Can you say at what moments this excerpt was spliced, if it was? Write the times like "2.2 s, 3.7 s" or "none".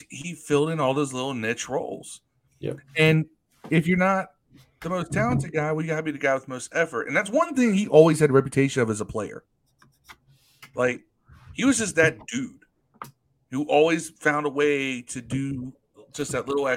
none